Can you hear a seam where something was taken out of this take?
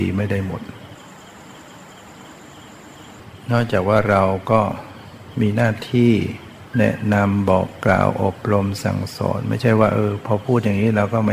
no; 0 cuts

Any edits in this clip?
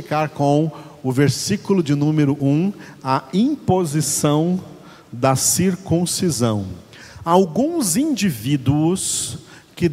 no; 0 cuts

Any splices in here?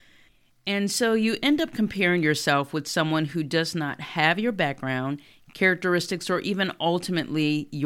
no; 0 cuts

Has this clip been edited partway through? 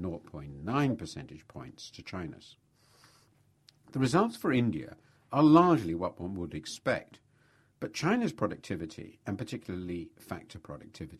no; 0 cuts

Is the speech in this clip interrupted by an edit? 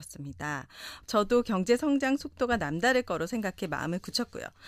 yes; 1 cut; at 1.0 s

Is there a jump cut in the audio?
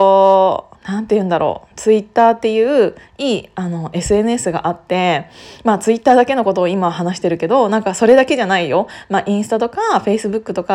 no; 0 cuts

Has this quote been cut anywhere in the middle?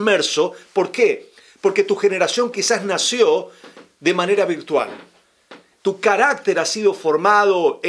no; 0 cuts

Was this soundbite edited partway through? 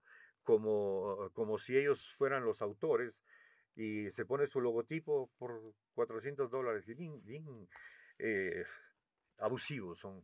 no; 0 cuts

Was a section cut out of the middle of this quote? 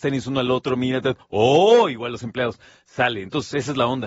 no; 0 cuts

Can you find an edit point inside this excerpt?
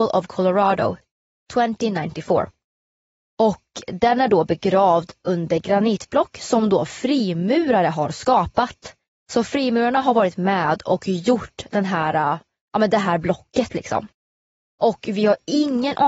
no; 0 cuts

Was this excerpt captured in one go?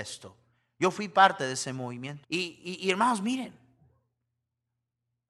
no; 1 cut; at 2.2 s

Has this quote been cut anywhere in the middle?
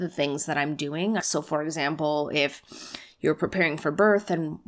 yes; 1 cut; at 1.2 s

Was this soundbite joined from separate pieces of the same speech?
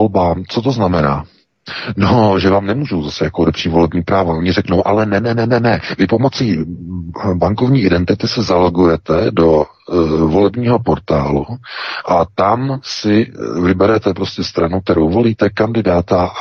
no; 0 cuts

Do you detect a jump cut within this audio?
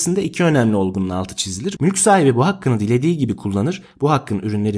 yes; 1 cut; at 1.8 s

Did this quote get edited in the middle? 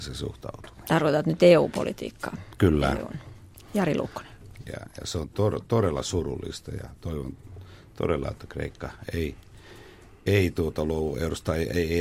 yes; 1 cut; at 4.7 s

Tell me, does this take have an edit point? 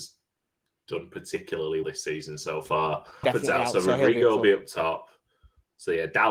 yes; 2 cuts; at 1.8 s, 3.2 s

